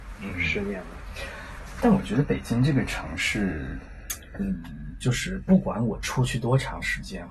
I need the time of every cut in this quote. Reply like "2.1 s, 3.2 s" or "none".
none

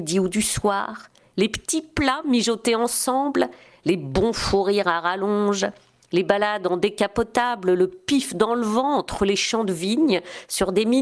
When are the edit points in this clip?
none

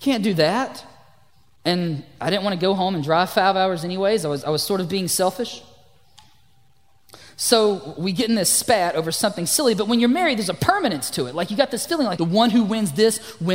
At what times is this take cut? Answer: 12.2 s

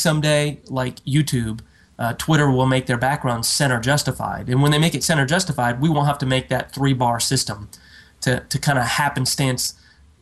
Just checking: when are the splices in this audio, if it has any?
none

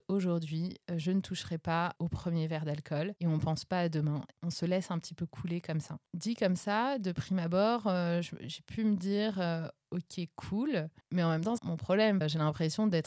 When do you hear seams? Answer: 11.6 s

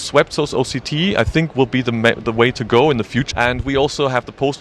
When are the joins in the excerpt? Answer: 3.3 s

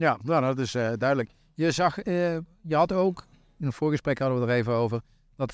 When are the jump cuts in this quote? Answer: none

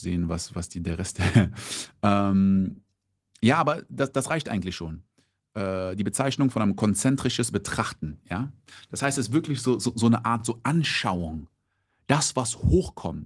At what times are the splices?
none

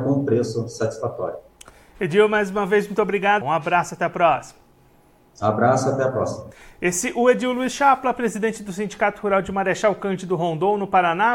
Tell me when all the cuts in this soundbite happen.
3.4 s

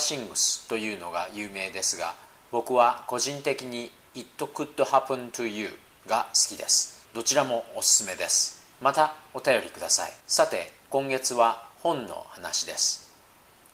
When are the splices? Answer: 7.0 s, 8.7 s, 10.2 s

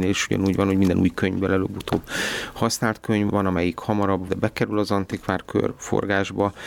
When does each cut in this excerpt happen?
3.3 s, 4.3 s

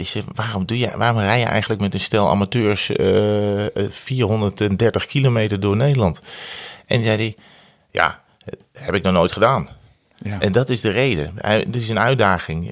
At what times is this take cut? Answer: none

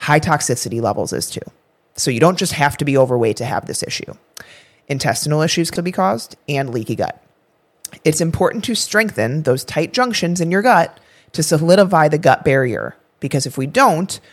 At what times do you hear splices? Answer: 5.8 s

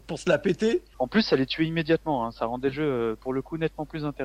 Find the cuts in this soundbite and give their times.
0.9 s

